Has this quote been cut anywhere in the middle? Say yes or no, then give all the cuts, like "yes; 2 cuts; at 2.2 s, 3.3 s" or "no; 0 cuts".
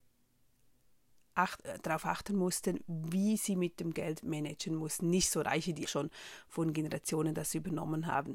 yes; 1 cut; at 5.9 s